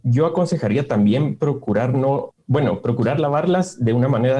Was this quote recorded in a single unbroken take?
no; 1 cut; at 2.3 s

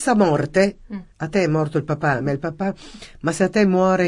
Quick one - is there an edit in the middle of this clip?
no; 0 cuts

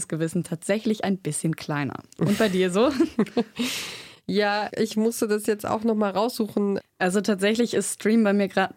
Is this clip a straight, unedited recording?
no; 2 cuts; at 4.7 s, 6.8 s

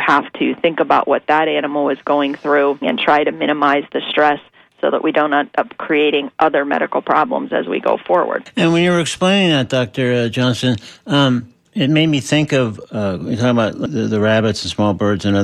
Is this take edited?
yes; 1 cut; at 2.8 s

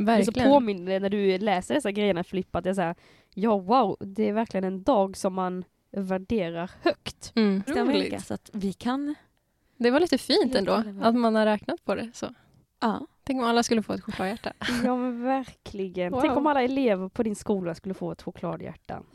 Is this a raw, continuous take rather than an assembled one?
no; 1 cut; at 7.7 s

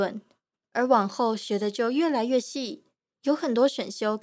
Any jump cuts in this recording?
no; 0 cuts

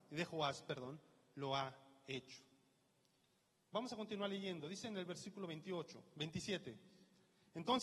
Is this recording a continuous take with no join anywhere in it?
no; 1 cut; at 3.5 s

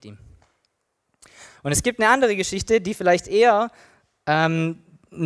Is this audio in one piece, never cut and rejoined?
yes; 0 cuts

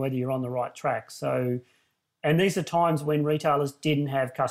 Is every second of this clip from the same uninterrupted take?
yes; 0 cuts

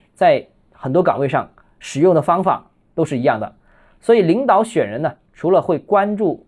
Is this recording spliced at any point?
no; 0 cuts

